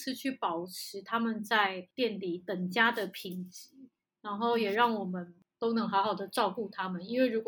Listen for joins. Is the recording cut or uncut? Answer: uncut